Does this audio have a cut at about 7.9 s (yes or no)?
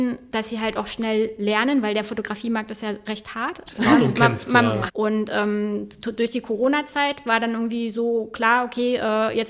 no